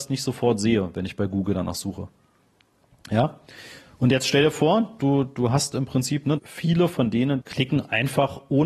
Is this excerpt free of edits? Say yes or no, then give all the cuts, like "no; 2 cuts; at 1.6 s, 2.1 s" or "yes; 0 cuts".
no; 2 cuts; at 6.4 s, 7.4 s